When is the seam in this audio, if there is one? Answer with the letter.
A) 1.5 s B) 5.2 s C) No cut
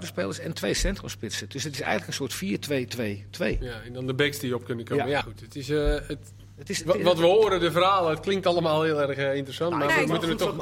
B